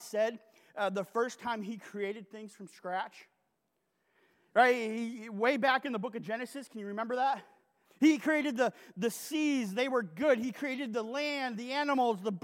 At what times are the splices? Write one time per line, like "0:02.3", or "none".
0:07.8